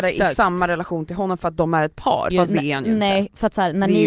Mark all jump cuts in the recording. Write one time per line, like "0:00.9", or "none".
0:02.3